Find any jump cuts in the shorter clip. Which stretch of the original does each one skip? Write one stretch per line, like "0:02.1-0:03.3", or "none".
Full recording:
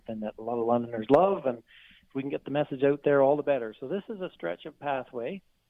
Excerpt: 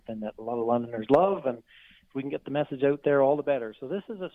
none